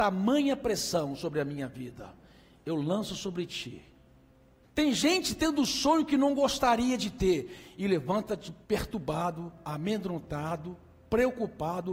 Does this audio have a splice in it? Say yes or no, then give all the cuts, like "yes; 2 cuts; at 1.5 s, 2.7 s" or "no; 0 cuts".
yes; 2 cuts; at 4.6 s, 8.6 s